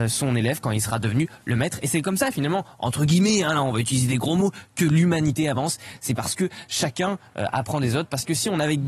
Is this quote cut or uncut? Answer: uncut